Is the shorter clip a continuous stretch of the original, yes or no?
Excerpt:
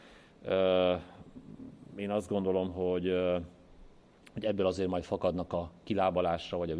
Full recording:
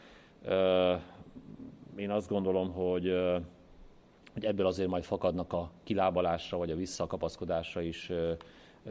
yes